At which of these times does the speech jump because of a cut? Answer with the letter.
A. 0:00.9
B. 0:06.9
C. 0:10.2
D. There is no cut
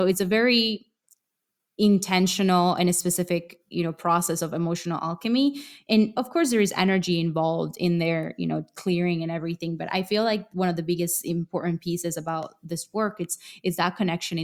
D